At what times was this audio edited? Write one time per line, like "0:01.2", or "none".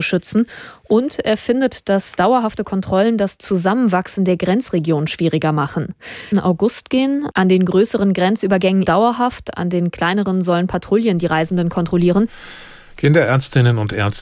0:06.3
0:08.8